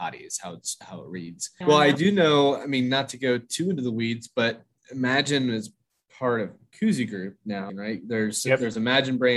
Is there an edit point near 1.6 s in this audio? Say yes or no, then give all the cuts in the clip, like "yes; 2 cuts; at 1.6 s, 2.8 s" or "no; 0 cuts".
yes; 2 cuts; at 1.6 s, 7.7 s